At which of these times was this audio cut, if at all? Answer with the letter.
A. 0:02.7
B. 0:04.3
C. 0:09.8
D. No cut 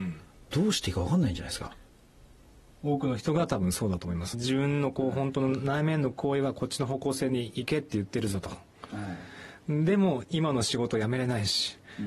B